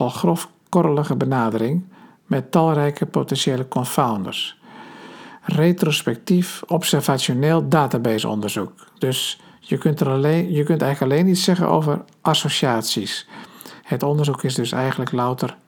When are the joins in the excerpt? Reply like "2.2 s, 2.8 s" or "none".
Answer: none